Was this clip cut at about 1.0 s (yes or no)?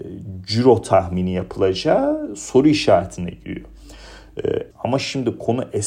no